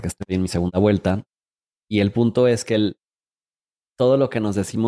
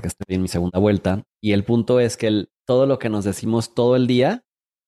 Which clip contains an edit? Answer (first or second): second